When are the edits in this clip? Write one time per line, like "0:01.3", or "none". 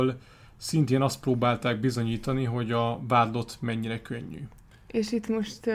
none